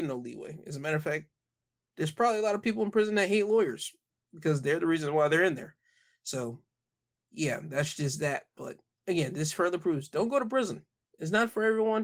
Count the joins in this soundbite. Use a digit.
0